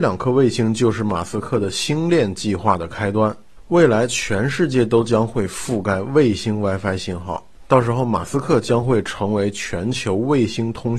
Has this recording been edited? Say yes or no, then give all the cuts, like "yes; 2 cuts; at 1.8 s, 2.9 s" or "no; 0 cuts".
no; 0 cuts